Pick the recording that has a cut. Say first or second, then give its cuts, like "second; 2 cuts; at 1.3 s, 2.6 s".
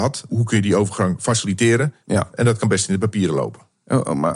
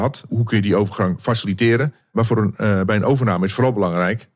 first; 1 cut; at 2.0 s